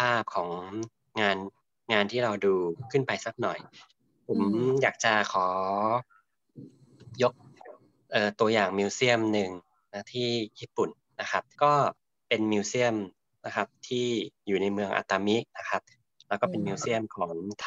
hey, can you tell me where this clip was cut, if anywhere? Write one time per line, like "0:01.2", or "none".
0:11.5

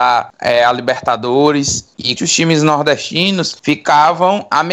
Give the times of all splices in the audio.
0:02.2

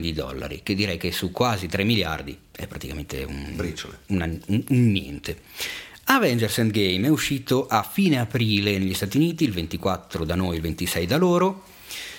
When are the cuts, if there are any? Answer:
none

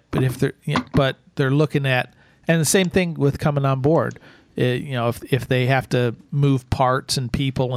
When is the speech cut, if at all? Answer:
none

